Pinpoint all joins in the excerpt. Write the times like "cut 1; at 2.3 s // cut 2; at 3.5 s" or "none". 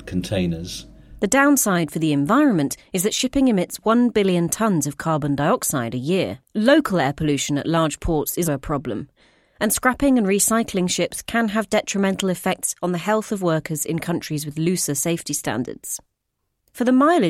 cut 1; at 6.5 s // cut 2; at 8.4 s

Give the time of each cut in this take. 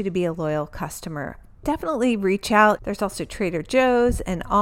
cut 1; at 2.8 s

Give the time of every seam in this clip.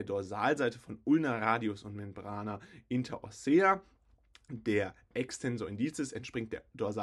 none

